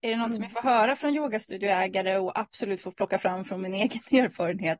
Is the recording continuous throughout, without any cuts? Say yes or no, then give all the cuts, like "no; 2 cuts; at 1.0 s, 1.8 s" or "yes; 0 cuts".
yes; 0 cuts